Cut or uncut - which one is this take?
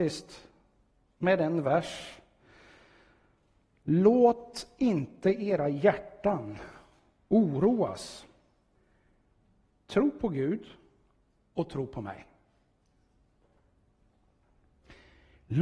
uncut